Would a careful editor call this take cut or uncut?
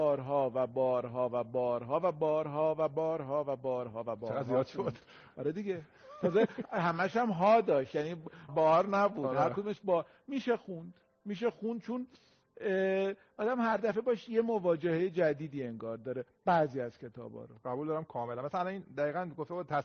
cut